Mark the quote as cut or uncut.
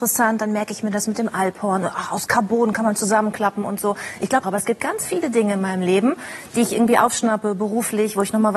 cut